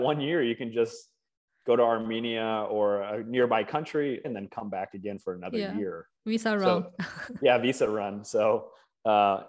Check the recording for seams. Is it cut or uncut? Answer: cut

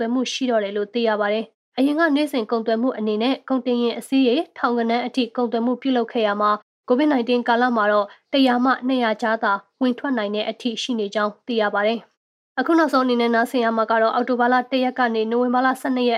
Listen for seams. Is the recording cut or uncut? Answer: uncut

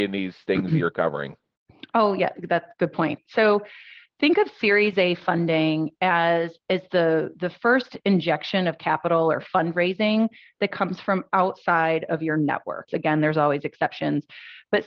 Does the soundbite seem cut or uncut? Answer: cut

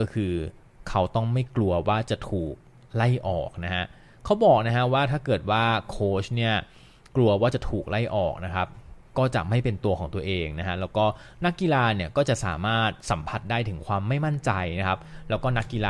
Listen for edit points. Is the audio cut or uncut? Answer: uncut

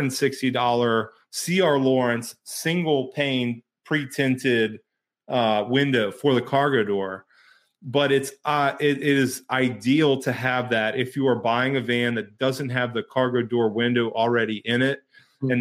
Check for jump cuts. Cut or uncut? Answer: uncut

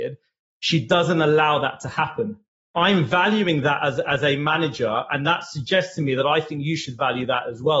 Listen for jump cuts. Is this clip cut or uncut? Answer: cut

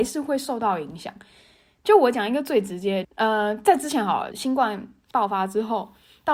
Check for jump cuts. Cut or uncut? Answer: cut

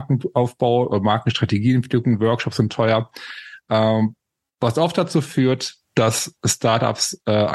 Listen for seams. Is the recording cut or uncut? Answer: uncut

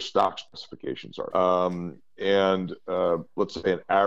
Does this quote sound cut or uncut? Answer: cut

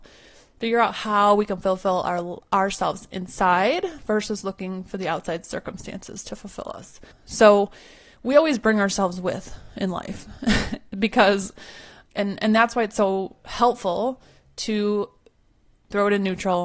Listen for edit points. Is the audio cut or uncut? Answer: cut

